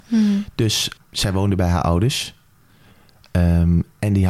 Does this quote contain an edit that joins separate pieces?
yes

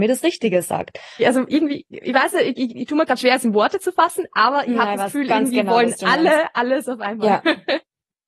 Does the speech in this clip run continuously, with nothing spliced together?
no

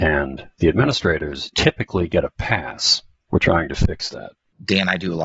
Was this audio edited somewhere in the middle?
yes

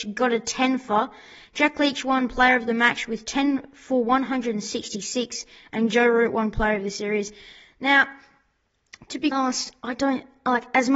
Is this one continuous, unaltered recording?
no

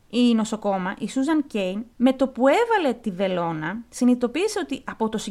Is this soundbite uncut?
no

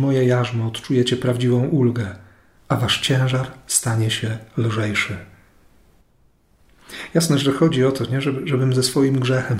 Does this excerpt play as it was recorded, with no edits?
no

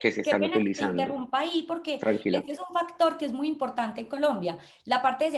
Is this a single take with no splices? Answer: yes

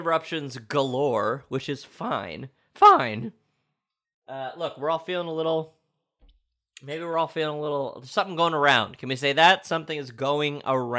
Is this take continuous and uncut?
yes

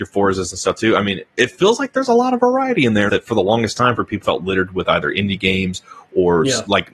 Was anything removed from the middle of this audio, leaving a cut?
yes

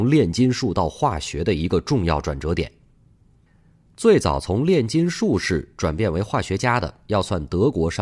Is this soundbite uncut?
yes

